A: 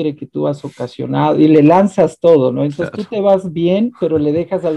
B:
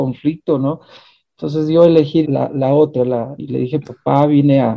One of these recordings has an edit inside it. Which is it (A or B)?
B